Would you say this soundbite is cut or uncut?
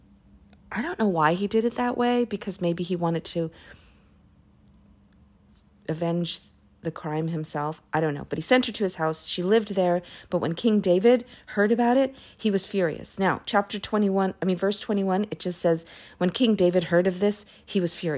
uncut